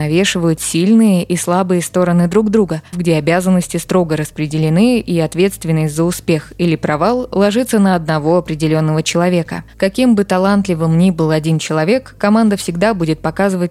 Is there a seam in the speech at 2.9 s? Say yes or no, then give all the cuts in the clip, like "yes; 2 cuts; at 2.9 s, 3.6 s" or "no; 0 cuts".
yes; 1 cut; at 2.9 s